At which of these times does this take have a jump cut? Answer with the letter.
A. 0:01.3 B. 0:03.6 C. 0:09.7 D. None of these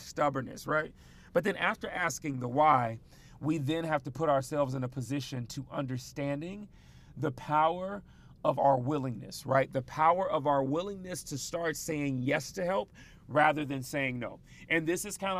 D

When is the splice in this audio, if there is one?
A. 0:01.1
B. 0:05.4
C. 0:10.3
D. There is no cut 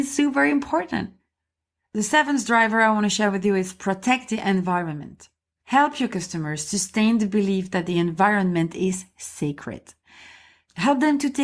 D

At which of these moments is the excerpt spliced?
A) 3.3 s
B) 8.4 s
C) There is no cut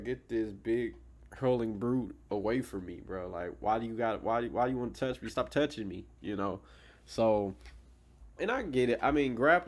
B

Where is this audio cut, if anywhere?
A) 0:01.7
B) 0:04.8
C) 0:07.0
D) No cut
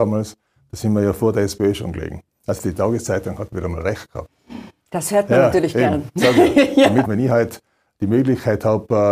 C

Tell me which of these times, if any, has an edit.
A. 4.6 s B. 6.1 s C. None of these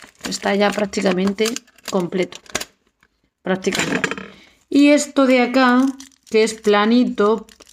C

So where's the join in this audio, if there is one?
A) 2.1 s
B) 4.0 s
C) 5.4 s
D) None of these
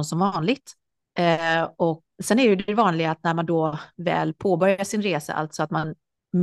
A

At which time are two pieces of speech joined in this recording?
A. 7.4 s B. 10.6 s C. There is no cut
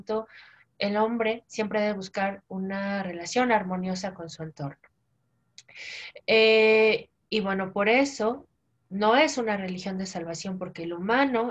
C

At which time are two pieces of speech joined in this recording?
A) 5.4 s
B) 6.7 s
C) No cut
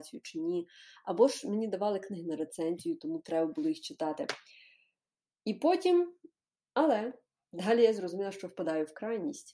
B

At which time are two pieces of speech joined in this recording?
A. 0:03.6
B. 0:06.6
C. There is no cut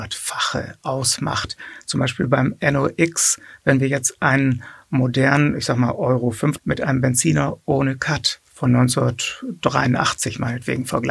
B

